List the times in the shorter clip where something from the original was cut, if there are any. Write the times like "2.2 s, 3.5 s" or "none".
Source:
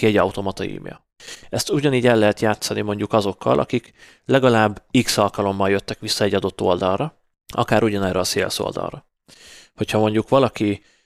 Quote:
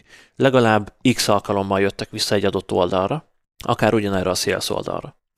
none